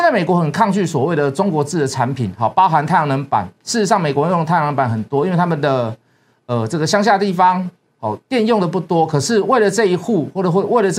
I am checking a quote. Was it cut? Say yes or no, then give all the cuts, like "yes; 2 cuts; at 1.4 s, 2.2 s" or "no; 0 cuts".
no; 0 cuts